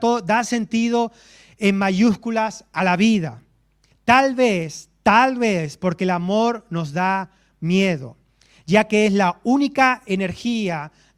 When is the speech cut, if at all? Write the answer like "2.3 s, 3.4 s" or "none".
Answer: 3.9 s